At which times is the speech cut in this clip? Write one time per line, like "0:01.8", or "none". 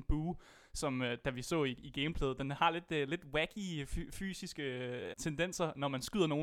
0:05.1